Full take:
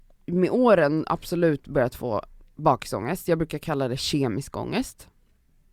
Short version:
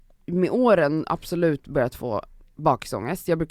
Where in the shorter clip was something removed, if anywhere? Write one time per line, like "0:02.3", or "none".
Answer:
none